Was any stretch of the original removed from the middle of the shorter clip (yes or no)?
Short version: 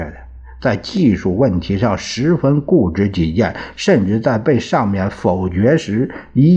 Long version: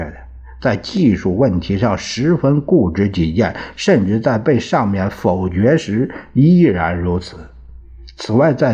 no